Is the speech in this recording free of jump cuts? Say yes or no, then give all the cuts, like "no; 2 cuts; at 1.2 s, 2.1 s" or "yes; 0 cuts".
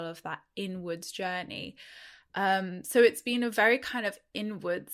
yes; 0 cuts